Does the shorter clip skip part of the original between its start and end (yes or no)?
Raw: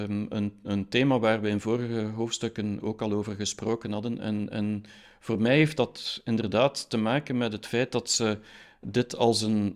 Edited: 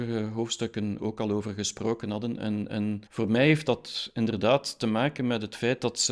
yes